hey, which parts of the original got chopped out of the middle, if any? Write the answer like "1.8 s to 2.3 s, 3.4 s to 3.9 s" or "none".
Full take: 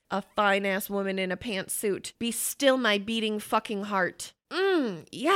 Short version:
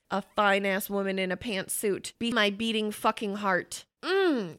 2.3 s to 2.8 s